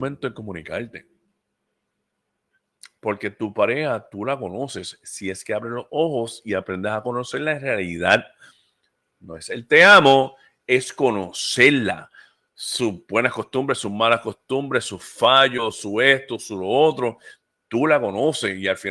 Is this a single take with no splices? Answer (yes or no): yes